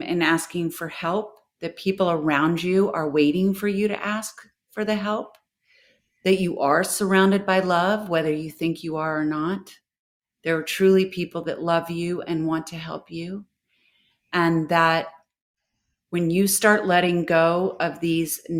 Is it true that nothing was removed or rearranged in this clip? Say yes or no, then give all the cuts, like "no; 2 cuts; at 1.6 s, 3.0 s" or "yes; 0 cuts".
yes; 0 cuts